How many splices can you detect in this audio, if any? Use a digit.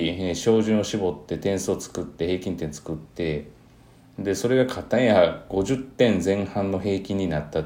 0